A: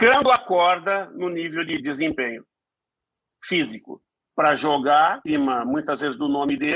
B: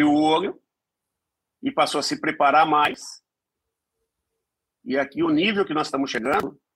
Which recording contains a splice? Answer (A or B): A